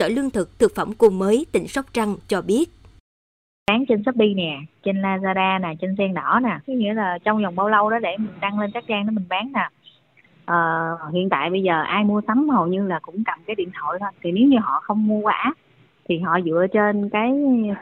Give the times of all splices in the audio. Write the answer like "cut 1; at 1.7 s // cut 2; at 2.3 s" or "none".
cut 1; at 6.6 s